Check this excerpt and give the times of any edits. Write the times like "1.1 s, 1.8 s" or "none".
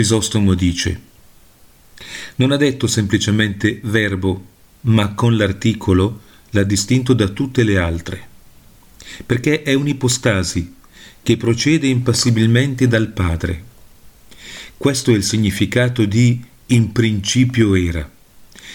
none

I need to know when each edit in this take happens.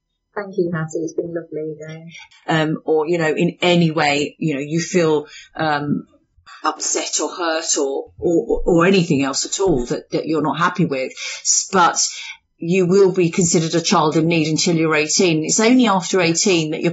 2.3 s, 4.4 s

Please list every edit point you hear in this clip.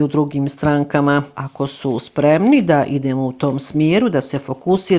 1.3 s

